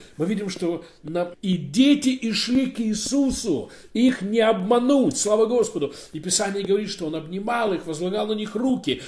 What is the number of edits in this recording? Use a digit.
1